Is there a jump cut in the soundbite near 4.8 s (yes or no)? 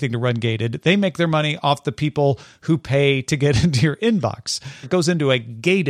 yes